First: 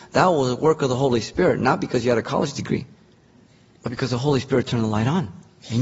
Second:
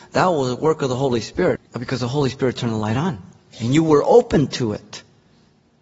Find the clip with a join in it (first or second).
second